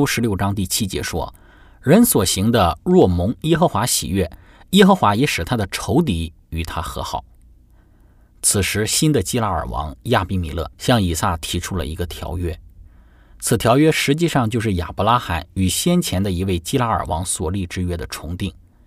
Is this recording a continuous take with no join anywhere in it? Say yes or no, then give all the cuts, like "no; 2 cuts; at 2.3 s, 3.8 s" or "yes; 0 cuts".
no; 1 cut; at 10.7 s